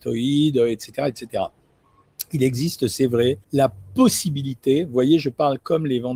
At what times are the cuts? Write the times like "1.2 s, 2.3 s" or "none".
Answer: 3.4 s